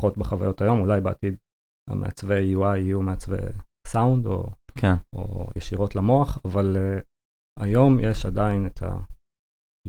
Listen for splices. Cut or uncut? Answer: uncut